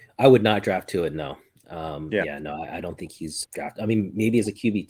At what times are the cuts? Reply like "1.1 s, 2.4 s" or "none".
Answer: 3.4 s